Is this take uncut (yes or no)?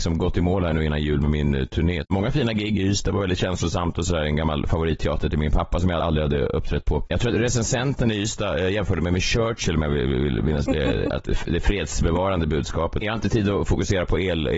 no